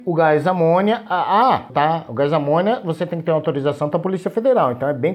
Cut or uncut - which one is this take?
cut